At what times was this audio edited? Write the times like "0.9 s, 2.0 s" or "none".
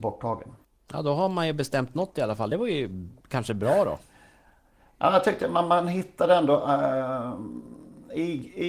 none